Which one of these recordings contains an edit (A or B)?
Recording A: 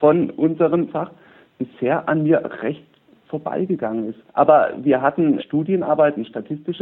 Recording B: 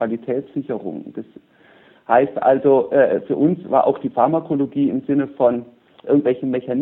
A